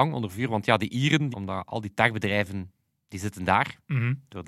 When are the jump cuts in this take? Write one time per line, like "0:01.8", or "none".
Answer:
0:01.3